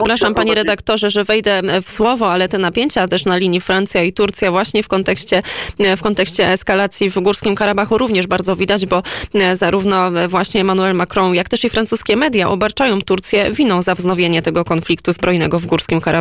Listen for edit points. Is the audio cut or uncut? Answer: uncut